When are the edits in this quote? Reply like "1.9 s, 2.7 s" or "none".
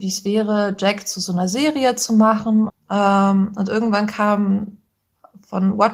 2.7 s